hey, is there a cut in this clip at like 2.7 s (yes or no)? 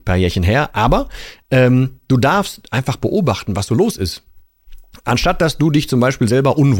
no